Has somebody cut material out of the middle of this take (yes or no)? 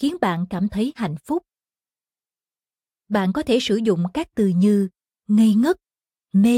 no